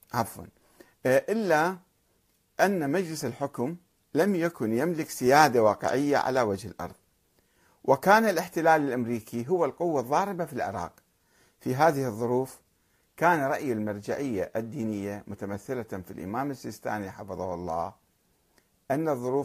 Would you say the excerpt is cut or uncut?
uncut